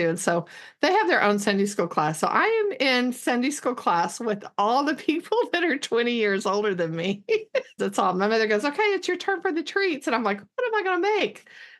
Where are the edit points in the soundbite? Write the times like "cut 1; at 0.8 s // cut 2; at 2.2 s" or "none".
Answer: cut 1; at 7.8 s